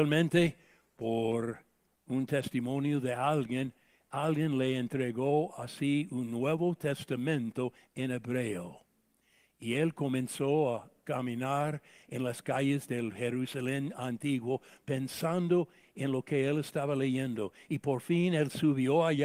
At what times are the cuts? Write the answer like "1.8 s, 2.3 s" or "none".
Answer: none